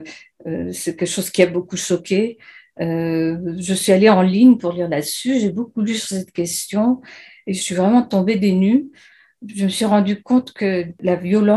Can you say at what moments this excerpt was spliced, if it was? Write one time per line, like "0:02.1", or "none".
none